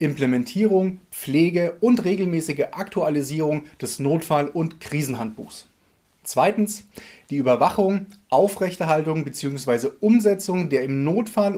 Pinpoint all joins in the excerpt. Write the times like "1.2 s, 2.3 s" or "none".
none